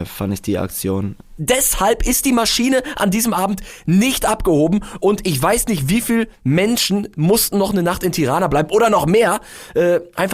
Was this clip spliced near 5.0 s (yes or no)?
no